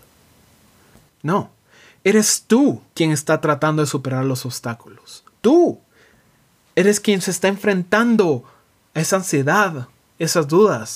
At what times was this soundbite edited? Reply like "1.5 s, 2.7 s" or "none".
1.1 s, 2.9 s

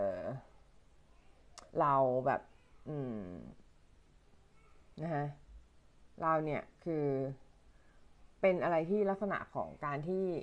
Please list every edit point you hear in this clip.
1.7 s

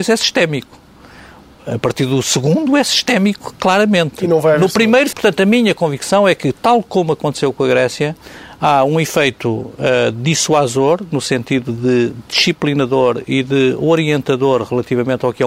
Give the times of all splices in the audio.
5.1 s

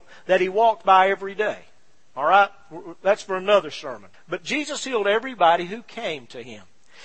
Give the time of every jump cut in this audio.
4.1 s

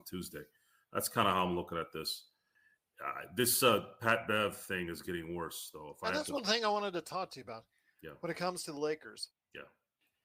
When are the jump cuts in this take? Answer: none

